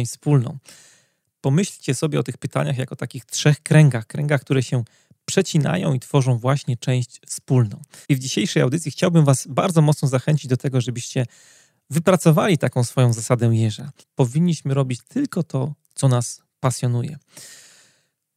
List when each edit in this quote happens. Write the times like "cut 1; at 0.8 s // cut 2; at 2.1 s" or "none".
cut 1; at 8.0 s // cut 2; at 14.0 s